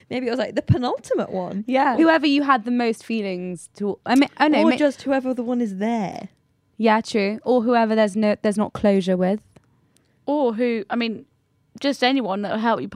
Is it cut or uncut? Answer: cut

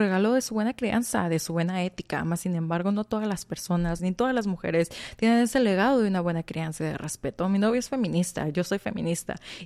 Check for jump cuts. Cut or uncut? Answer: cut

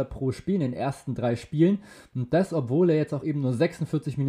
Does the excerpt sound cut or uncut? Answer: uncut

